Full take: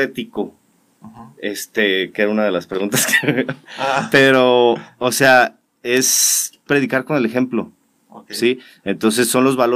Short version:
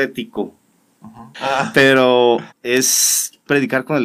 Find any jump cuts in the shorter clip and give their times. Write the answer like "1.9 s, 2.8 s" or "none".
1.3 s, 2.5 s